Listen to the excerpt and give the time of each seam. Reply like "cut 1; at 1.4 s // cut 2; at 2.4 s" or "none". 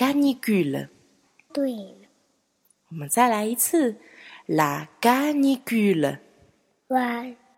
cut 1; at 1.5 s